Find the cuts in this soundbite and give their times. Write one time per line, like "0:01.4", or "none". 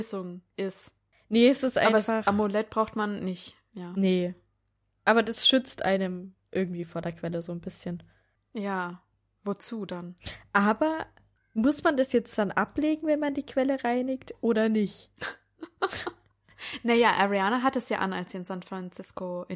none